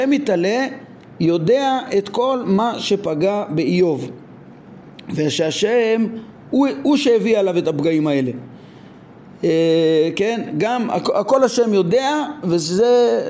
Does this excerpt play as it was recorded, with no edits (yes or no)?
yes